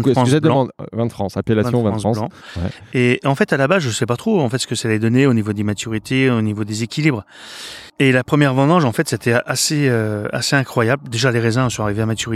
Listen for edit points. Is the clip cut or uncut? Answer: uncut